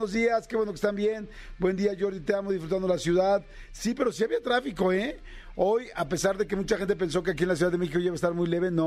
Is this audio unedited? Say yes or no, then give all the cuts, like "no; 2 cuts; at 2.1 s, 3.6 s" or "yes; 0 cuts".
yes; 0 cuts